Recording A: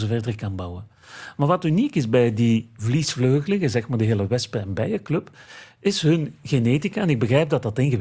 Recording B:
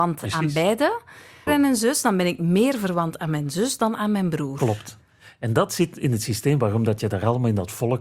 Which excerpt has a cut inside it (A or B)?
B